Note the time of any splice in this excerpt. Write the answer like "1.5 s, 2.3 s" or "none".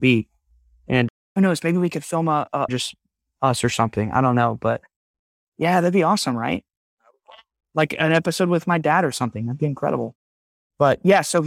2.7 s